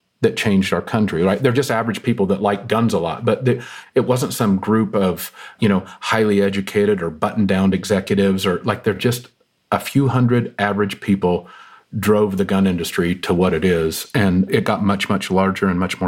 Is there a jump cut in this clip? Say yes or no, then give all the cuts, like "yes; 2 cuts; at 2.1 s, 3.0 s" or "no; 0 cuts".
no; 0 cuts